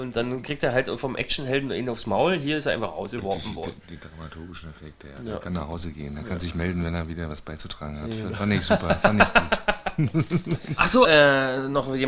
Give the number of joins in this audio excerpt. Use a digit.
1